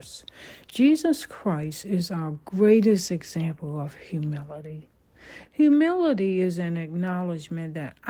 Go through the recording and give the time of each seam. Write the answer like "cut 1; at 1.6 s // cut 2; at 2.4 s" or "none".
cut 1; at 5.4 s